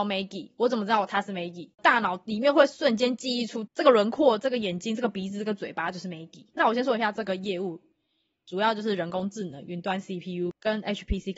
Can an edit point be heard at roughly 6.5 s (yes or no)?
yes